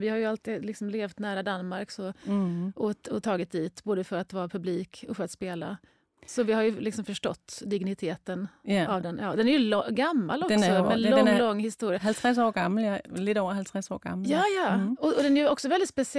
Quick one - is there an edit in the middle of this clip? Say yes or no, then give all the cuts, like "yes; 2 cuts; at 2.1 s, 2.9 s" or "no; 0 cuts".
no; 0 cuts